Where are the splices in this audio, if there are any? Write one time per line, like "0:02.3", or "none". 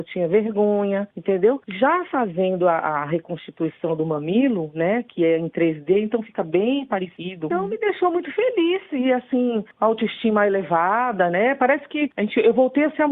none